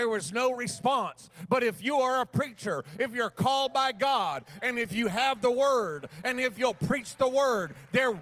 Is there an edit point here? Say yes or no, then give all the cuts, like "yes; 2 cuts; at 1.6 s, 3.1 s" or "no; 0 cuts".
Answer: no; 0 cuts